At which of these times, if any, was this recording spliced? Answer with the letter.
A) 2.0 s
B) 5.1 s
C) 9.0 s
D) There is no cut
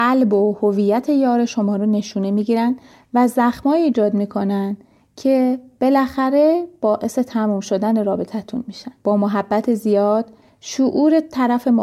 C